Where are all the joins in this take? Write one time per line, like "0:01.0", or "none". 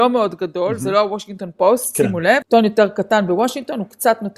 0:02.4